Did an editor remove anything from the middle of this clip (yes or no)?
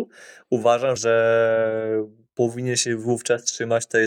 yes